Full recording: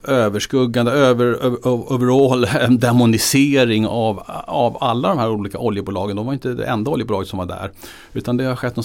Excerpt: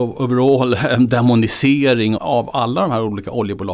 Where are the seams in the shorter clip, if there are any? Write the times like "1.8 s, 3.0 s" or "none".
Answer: 2.2 s